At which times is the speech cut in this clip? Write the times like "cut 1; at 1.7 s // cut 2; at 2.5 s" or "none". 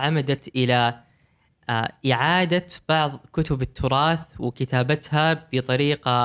none

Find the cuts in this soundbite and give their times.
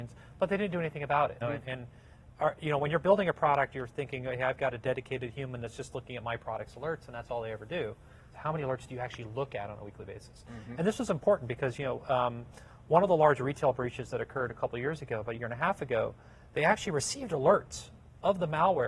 cut 1; at 1.4 s // cut 2; at 8.3 s

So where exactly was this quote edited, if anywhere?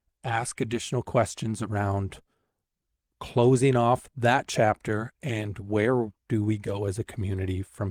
none

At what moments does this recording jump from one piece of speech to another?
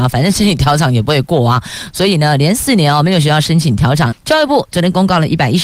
cut 1; at 4.1 s

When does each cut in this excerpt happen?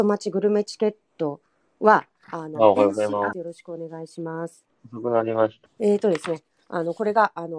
cut 1; at 3.3 s // cut 2; at 5.7 s

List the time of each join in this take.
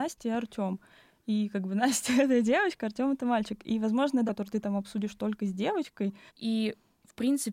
cut 1; at 4.3 s // cut 2; at 6.3 s

